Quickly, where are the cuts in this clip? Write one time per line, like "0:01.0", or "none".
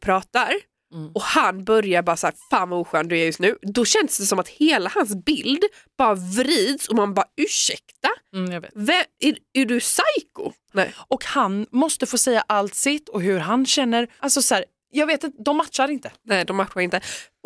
0:10.7
0:14.2
0:15.3